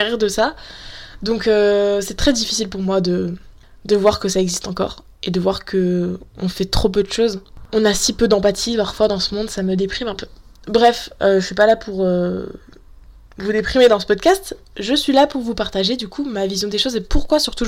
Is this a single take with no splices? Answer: yes; 0 cuts

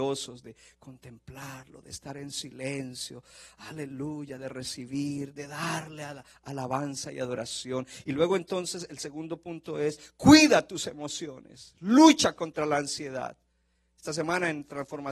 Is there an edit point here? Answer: no; 0 cuts

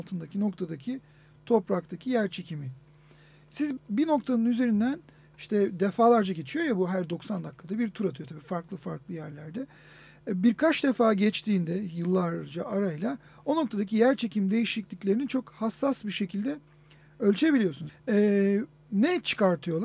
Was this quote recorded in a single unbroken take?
no; 2 cuts; at 3.8 s, 17.9 s

